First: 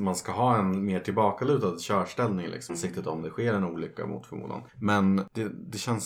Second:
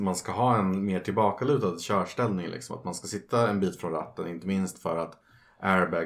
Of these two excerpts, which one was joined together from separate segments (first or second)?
first